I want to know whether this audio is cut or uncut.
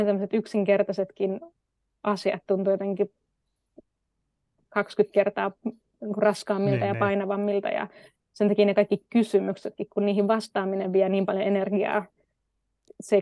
uncut